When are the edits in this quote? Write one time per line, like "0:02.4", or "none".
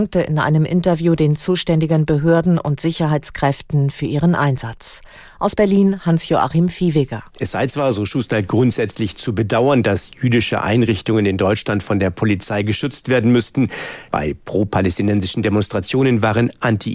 0:07.3
0:14.1